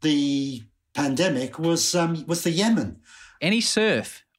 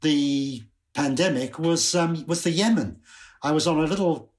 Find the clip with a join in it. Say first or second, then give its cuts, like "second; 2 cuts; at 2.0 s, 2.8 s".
first; 1 cut; at 3.4 s